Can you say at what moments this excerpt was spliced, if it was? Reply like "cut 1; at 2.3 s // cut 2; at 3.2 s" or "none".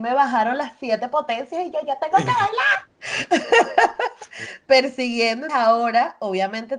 cut 1; at 5.5 s